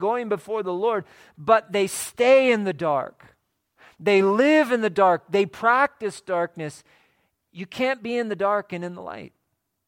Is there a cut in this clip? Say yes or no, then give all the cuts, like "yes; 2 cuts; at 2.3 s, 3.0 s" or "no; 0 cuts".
no; 0 cuts